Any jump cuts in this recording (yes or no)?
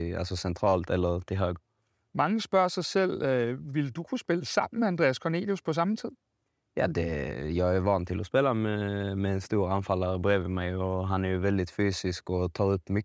no